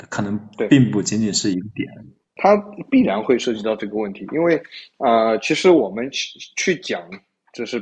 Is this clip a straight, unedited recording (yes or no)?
yes